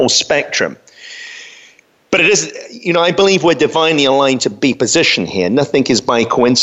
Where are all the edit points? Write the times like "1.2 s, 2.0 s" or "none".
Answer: none